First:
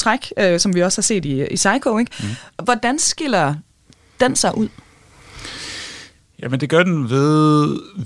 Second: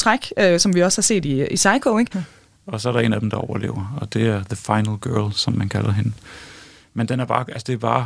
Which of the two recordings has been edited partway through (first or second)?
second